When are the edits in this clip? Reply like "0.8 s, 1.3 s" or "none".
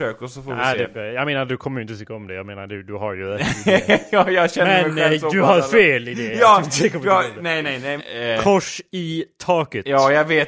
8.0 s

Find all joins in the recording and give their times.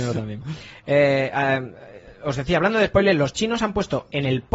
none

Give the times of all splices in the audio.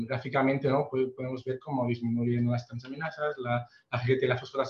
none

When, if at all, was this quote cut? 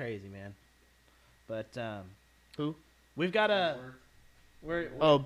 none

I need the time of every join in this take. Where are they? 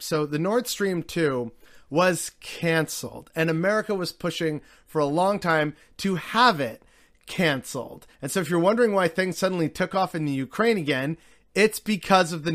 none

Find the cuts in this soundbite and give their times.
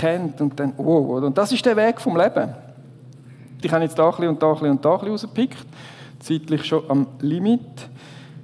3.6 s

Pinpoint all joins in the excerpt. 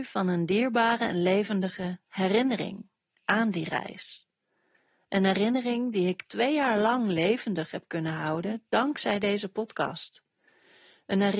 none

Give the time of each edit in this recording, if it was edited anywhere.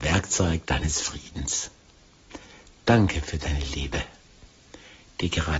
none

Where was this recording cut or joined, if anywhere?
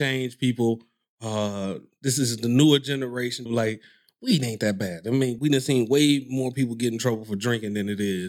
3.5 s, 5.4 s

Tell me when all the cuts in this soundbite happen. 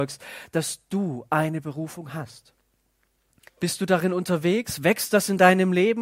3.5 s

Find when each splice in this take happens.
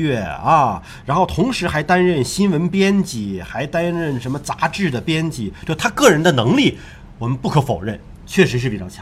none

